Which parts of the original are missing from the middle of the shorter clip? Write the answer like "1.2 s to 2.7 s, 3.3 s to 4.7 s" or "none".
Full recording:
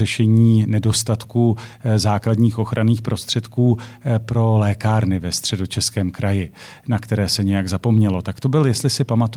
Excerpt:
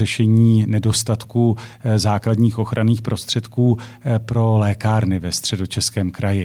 none